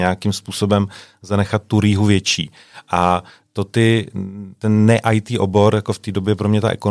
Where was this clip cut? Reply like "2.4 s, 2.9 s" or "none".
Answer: none